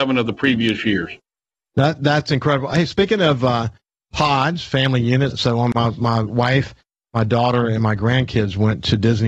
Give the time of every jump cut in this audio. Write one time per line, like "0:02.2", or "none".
0:05.3